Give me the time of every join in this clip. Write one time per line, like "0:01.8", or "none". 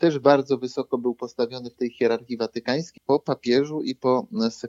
0:03.0